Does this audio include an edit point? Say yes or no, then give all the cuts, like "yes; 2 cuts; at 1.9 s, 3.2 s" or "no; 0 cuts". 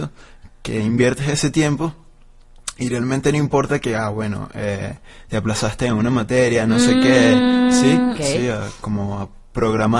yes; 1 cut; at 8.2 s